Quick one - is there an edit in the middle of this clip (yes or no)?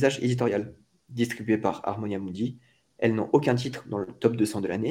no